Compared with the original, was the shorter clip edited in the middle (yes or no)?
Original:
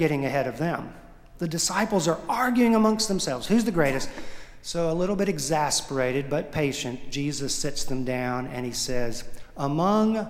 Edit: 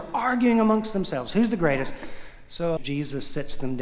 yes